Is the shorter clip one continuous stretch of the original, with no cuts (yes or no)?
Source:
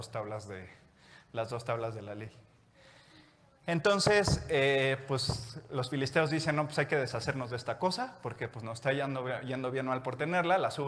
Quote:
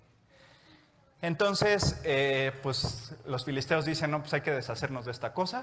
yes